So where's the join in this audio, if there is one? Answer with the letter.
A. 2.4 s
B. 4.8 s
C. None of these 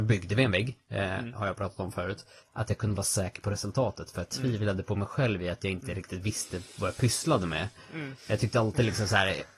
A